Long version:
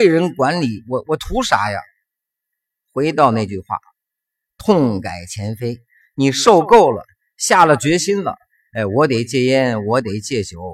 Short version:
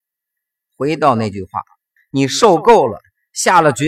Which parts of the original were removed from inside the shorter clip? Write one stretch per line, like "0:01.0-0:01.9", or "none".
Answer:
0:04.1-0:06.0